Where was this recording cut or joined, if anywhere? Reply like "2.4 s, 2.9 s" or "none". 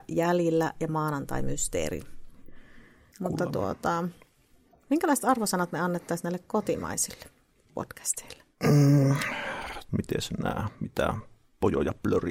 3.1 s, 9.9 s